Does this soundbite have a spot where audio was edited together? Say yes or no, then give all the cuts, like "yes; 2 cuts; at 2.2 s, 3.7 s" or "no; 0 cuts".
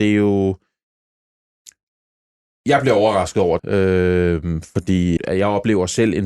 yes; 2 cuts; at 3.6 s, 5.2 s